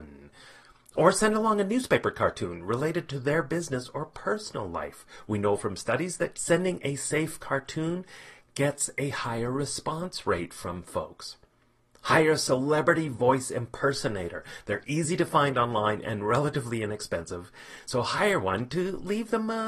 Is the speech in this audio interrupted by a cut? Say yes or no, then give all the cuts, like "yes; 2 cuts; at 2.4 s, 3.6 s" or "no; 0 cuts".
yes; 1 cut; at 6.3 s